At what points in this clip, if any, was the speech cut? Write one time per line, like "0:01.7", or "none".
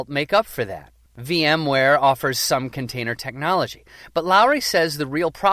0:01.1